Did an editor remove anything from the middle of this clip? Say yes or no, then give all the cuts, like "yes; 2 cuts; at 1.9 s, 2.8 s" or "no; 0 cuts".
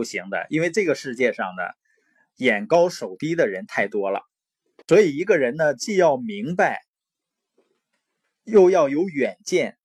no; 0 cuts